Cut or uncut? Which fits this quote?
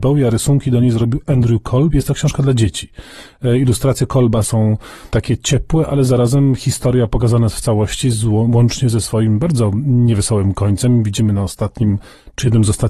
uncut